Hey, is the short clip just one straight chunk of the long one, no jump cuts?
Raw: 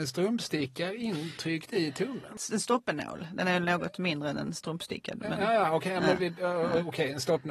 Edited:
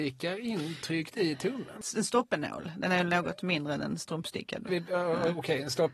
no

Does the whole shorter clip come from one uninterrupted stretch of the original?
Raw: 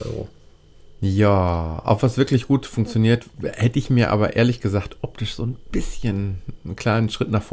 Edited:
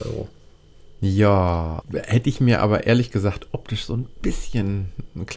no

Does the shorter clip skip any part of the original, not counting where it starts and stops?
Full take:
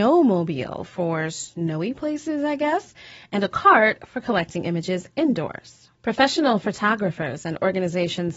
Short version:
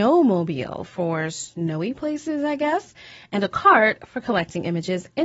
no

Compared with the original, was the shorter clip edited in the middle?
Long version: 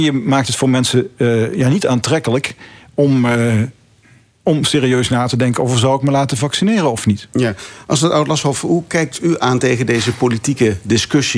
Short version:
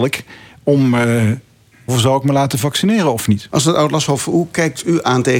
yes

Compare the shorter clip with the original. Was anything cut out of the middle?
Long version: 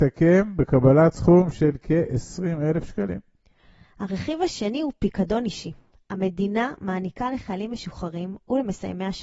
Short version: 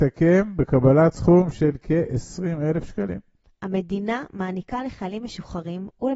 yes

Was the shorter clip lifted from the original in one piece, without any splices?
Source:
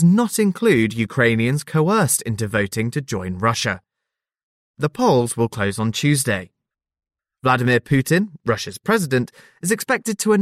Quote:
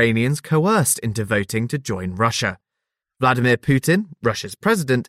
no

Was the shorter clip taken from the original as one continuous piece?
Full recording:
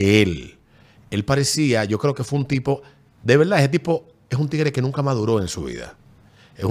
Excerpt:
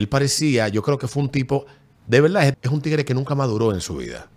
no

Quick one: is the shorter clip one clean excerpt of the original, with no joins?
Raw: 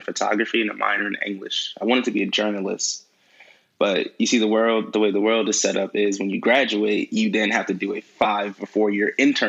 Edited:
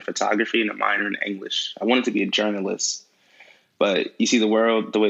yes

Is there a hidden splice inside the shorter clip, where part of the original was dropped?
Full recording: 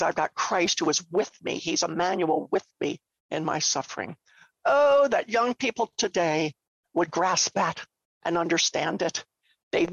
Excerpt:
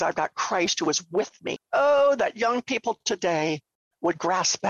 yes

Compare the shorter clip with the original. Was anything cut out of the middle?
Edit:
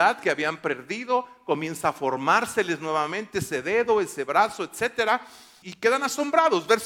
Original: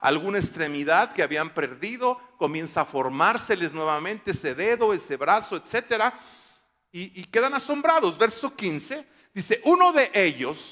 yes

